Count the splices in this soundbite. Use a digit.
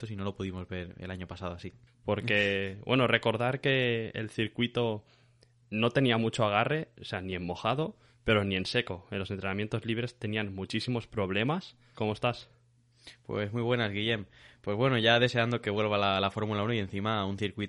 2